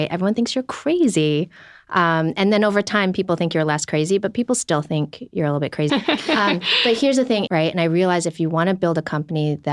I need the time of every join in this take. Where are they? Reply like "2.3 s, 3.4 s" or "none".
5.9 s, 7.5 s